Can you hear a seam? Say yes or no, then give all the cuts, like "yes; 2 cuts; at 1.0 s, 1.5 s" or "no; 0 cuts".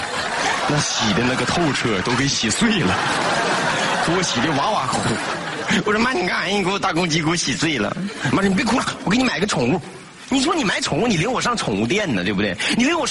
no; 0 cuts